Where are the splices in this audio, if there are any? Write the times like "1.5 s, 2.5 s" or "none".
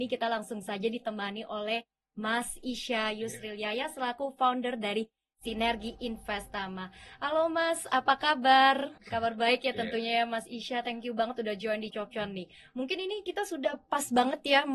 9.0 s, 11.9 s